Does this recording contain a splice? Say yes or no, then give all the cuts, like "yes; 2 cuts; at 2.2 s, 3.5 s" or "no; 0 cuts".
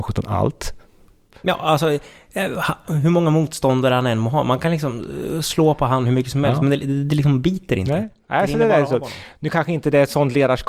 no; 0 cuts